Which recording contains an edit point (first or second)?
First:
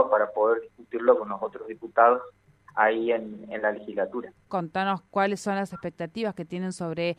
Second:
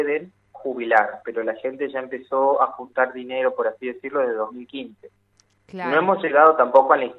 first